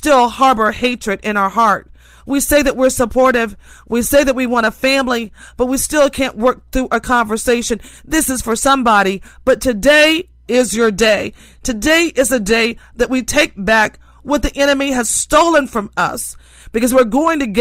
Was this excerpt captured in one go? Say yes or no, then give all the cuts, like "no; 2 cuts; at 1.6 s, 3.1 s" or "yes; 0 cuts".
yes; 0 cuts